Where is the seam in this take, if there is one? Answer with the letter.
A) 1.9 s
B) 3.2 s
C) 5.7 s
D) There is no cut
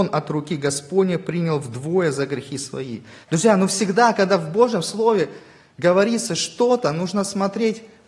B